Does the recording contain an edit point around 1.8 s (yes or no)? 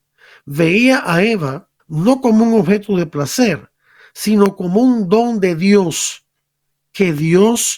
yes